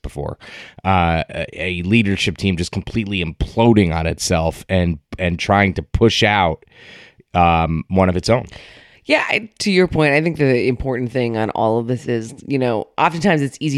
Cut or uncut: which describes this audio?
uncut